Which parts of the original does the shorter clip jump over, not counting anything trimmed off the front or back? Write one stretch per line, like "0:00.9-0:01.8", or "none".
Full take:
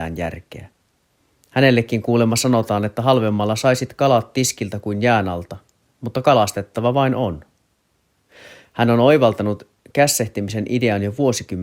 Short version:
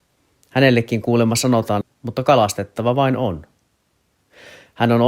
0:02.8-0:05.8